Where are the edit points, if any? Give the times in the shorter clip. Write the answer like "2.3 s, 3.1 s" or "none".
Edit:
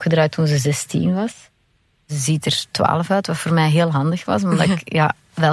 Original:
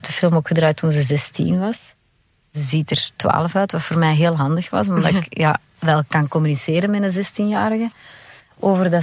none